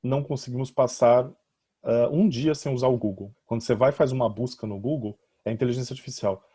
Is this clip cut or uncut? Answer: cut